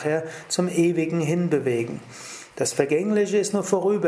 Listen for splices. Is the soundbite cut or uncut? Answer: uncut